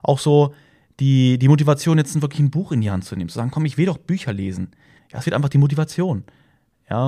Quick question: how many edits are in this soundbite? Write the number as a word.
one